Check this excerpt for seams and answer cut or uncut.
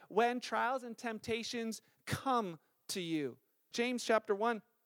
cut